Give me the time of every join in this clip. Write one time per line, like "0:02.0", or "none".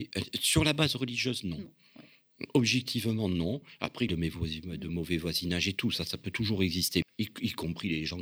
0:04.1
0:07.0